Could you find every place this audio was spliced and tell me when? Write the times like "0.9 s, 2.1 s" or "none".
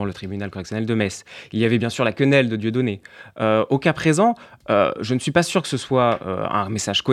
none